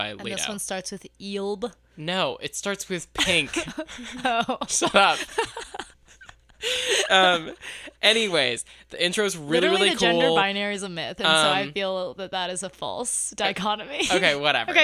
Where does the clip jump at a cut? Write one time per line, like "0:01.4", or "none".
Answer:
none